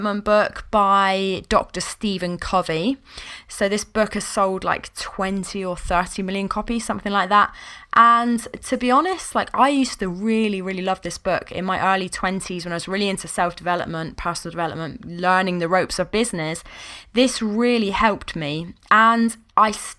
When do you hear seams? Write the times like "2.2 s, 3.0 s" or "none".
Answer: none